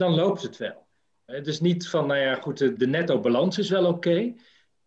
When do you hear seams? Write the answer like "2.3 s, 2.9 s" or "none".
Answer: 1.3 s, 2.8 s